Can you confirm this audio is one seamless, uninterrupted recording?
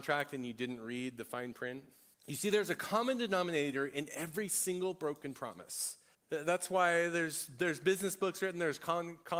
no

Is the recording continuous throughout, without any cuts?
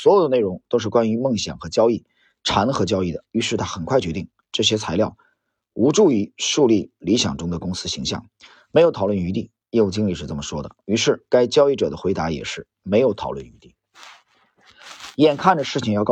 yes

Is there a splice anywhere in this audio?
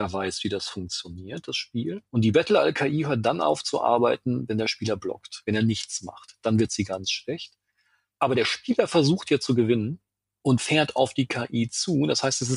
no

